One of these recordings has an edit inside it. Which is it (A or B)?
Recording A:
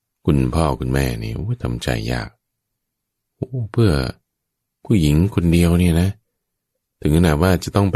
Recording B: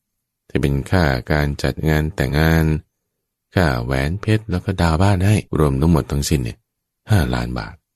B